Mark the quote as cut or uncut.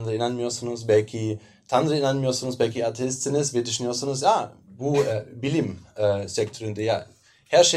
uncut